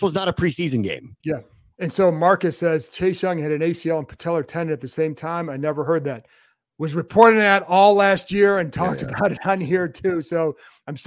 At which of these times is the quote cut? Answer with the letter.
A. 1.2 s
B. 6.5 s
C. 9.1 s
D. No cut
A